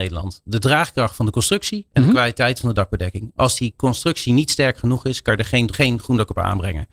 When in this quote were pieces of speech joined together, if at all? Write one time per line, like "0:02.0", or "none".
0:05.7